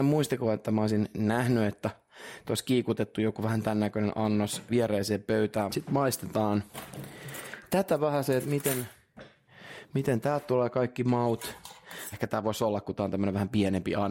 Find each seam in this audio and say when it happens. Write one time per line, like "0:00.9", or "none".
0:04.7
0:05.7
0:12.1